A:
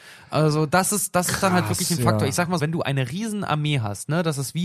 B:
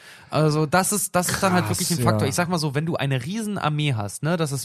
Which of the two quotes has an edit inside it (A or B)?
A